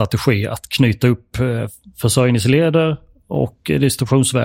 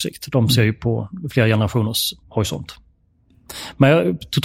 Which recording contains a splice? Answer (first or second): second